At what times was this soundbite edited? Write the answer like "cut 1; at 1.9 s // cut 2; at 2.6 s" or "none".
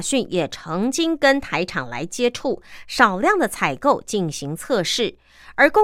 none

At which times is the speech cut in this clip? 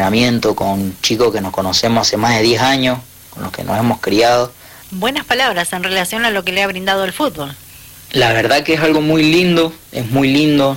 cut 1; at 4.8 s // cut 2; at 8.1 s

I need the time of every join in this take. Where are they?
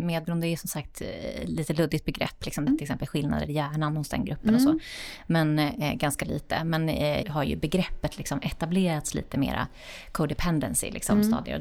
cut 1; at 2.7 s // cut 2; at 7.2 s

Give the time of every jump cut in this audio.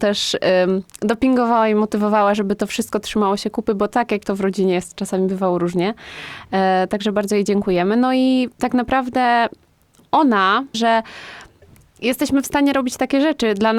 cut 1; at 6.9 s // cut 2; at 10.7 s

